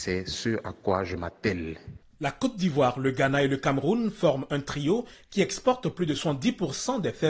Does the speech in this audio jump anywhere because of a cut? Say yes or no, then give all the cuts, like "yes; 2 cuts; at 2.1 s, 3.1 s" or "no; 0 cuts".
yes; 1 cut; at 2.0 s